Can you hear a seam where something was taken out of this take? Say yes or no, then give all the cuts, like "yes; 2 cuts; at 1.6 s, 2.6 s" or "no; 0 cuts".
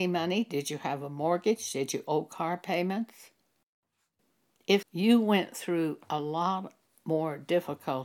yes; 1 cut; at 4.8 s